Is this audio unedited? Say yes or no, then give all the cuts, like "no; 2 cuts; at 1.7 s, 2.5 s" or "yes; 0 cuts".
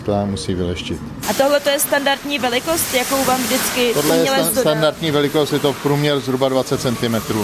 no; 1 cut; at 1.2 s